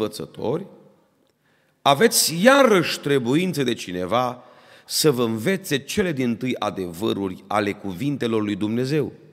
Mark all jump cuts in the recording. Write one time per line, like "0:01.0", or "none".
none